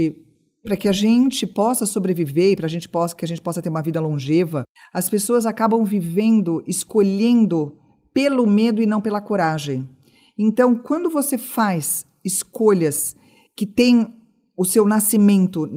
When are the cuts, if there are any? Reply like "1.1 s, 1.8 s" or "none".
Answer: 4.8 s